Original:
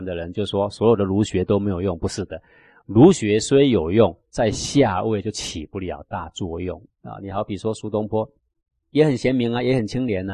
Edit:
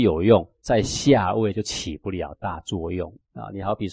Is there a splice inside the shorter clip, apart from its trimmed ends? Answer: no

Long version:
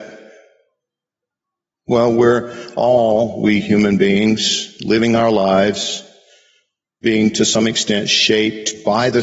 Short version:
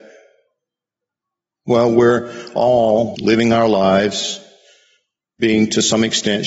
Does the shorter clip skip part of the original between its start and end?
yes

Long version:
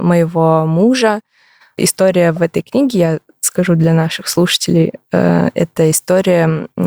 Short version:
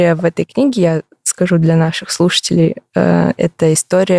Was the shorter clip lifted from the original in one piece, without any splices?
yes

